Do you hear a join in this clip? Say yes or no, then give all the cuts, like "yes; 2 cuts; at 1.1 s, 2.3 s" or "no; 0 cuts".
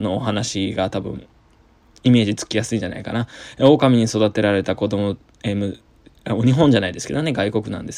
no; 0 cuts